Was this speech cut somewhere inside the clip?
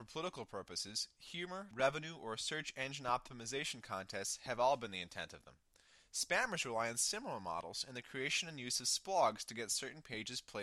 yes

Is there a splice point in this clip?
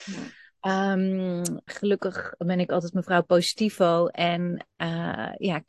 yes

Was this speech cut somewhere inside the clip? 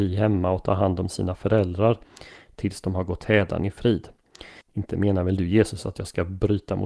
yes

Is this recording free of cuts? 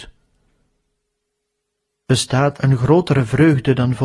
no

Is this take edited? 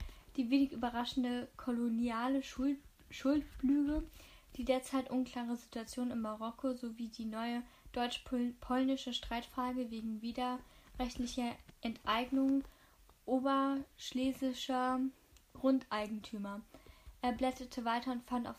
no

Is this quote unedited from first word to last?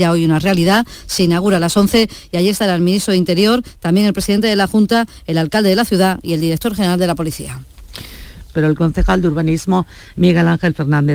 no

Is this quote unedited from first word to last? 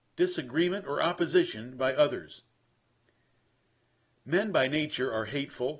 yes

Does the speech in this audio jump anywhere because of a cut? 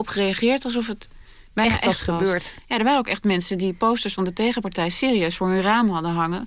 no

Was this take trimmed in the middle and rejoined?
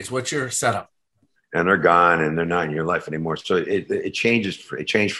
yes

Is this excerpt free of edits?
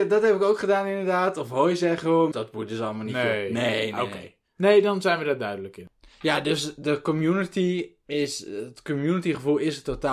no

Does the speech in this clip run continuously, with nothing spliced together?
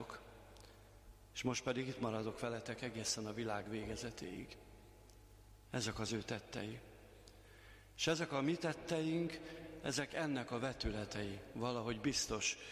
yes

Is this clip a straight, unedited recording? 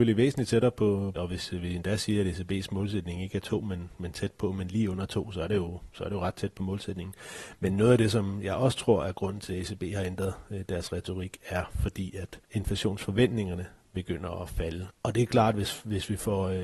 no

